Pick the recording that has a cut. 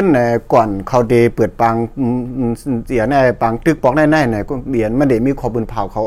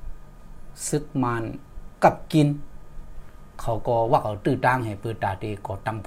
second; 1 cut; at 1.9 s

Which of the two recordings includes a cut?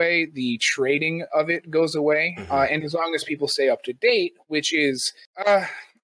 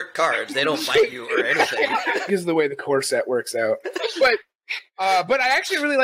second; 2 cuts; at 2.3 s, 3.8 s

